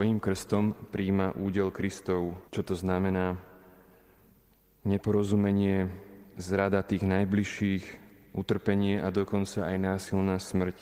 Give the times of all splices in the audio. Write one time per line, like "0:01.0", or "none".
0:02.5